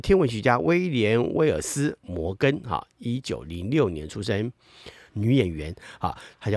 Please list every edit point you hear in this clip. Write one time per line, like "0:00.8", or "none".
0:05.1